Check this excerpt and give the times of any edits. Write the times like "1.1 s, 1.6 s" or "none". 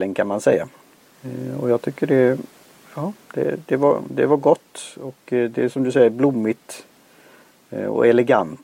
none